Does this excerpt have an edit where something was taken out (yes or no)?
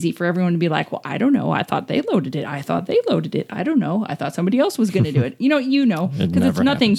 no